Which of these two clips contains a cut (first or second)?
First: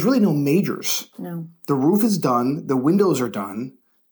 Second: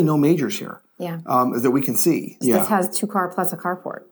second